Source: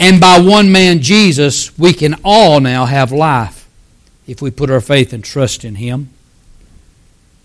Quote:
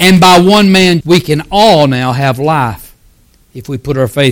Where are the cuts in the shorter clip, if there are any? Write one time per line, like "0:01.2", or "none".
0:01.0